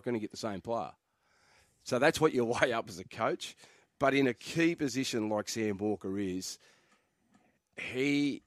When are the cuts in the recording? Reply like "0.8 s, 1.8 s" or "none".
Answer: none

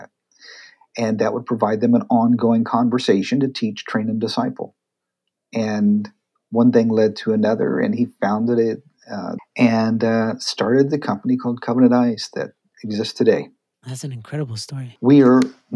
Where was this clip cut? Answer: 9.4 s

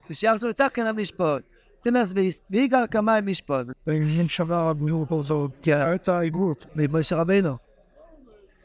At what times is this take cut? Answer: 3.7 s, 6.7 s

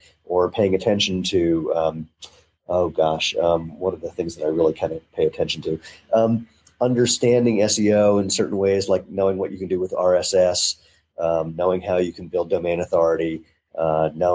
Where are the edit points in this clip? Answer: none

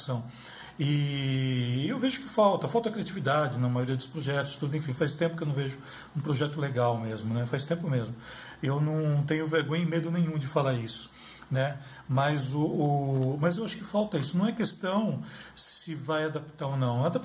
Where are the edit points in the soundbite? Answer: none

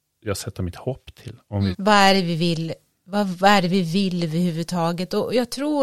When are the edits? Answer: 1.7 s

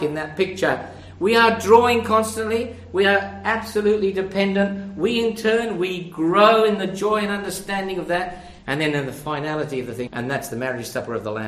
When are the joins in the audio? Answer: 8.6 s, 10.1 s

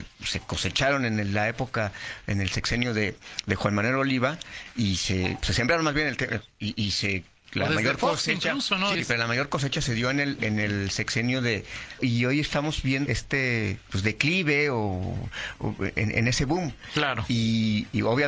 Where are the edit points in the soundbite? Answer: 8.9 s, 12.0 s, 13.1 s

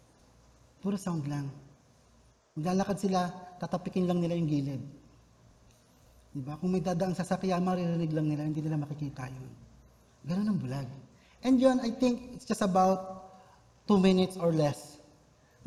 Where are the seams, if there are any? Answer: none

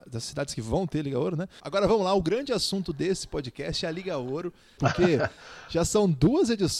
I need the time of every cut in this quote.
1.6 s, 4.8 s

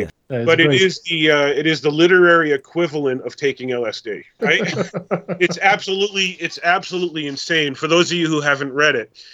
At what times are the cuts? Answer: 4.4 s

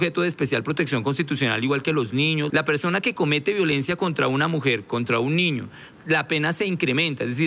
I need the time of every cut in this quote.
2.5 s, 5.9 s

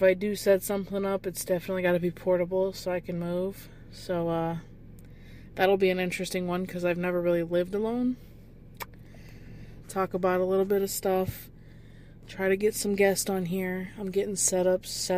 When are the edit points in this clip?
9.8 s

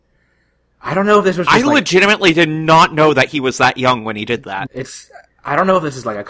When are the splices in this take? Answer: 4.7 s

